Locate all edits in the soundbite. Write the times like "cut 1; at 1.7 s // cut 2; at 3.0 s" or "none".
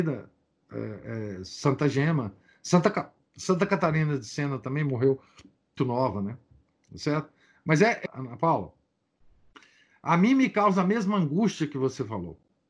cut 1; at 5.8 s // cut 2; at 8.1 s